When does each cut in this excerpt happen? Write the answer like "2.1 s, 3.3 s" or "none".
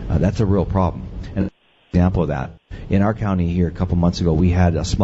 none